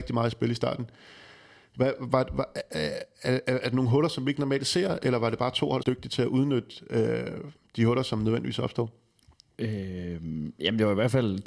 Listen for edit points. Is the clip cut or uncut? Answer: cut